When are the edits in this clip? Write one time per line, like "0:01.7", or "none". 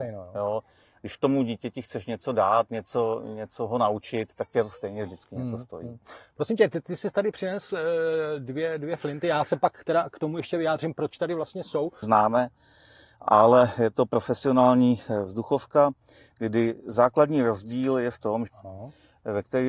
0:12.0
0:18.5